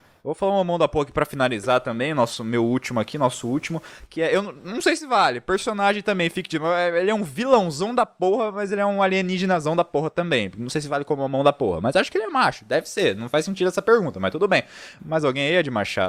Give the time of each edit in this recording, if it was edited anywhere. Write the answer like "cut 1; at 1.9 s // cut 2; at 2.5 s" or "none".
cut 1; at 15.0 s